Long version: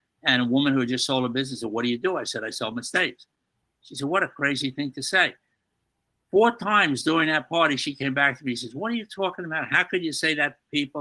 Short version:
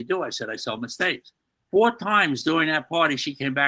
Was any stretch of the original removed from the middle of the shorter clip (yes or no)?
yes